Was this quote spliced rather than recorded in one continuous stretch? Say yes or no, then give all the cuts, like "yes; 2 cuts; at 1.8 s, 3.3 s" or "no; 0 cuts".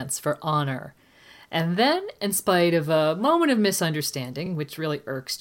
no; 0 cuts